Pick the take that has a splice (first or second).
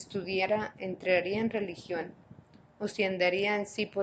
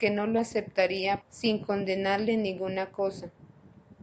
second